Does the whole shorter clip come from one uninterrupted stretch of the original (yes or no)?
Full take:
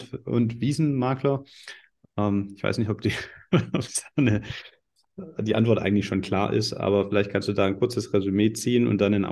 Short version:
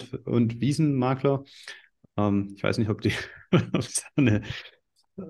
yes